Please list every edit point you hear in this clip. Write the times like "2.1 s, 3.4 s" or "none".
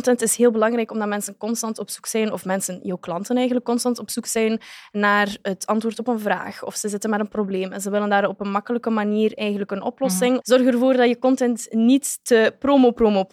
10.4 s